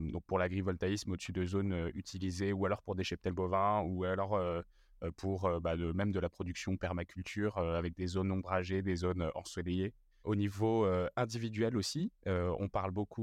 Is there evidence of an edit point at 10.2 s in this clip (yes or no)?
yes